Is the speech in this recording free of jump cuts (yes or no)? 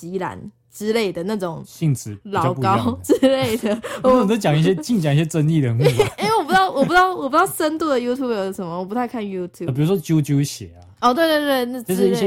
yes